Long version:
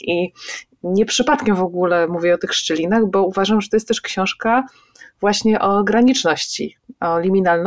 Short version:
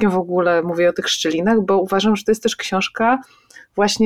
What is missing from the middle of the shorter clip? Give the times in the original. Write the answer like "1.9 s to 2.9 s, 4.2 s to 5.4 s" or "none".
none